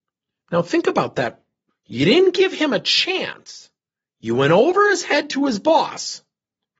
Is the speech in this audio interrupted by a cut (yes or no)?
yes